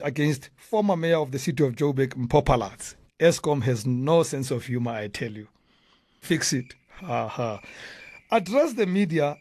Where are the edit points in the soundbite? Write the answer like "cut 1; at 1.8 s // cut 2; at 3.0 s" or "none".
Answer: cut 1; at 3.0 s // cut 2; at 6.2 s // cut 3; at 7.3 s